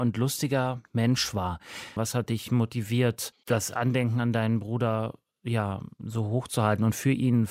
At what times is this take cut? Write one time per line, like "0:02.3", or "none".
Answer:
0:02.0